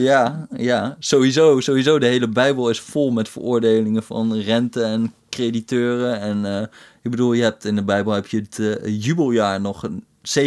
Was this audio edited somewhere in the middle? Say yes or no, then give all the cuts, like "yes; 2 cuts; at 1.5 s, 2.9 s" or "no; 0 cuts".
no; 0 cuts